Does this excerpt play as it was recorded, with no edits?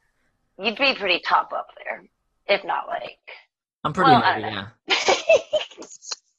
yes; 0 cuts

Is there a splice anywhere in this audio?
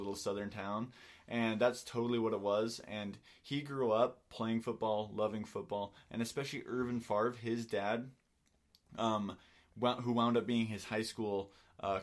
no; 0 cuts

